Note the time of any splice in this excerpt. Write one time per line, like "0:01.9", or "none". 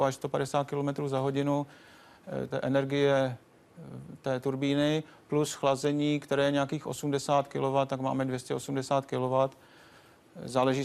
0:02.5